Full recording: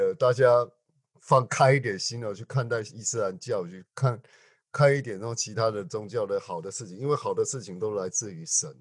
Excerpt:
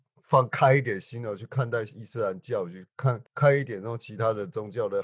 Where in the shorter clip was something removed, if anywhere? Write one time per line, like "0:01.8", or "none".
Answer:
0:03.3